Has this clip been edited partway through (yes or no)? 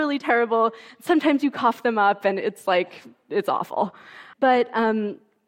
yes